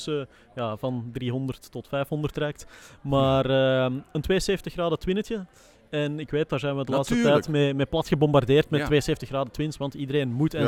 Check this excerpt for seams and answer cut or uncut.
uncut